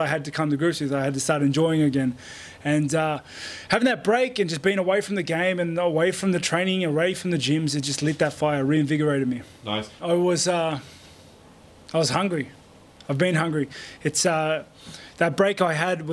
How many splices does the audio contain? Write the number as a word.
one